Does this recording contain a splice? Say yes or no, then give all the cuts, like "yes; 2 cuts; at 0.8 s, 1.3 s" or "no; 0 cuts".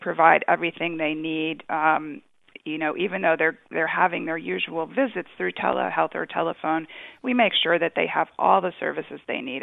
no; 0 cuts